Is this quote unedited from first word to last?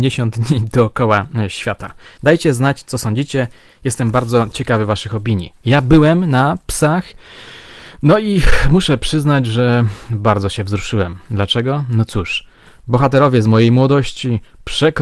no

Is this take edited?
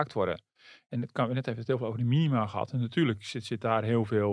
no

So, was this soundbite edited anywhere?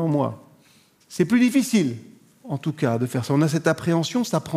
yes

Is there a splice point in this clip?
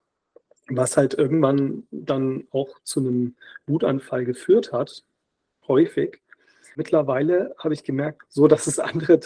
yes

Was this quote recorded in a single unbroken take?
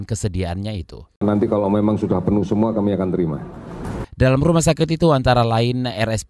no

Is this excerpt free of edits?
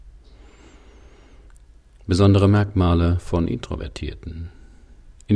yes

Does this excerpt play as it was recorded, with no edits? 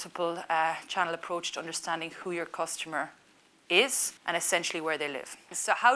no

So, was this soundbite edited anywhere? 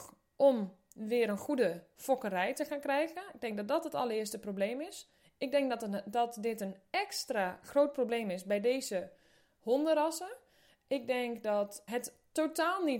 yes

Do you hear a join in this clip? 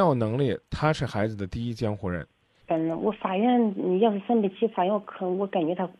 yes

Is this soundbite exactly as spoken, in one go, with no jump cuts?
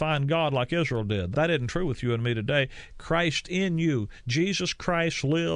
no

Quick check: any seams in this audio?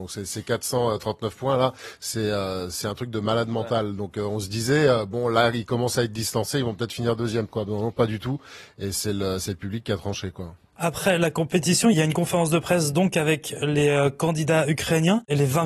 no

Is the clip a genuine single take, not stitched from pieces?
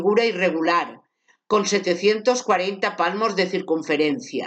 yes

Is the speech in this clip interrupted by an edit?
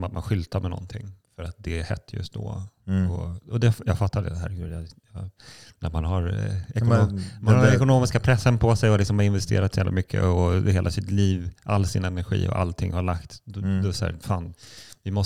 no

